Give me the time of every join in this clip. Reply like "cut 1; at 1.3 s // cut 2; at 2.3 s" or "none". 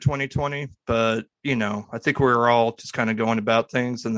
none